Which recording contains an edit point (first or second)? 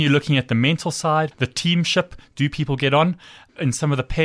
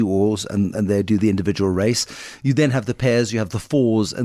first